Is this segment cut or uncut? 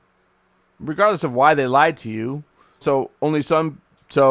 cut